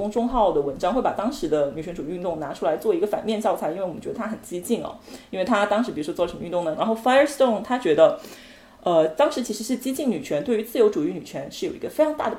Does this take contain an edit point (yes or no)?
yes